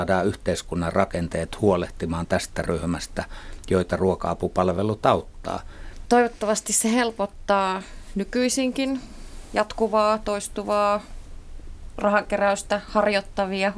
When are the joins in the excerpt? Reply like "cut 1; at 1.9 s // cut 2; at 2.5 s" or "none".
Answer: cut 1; at 6.1 s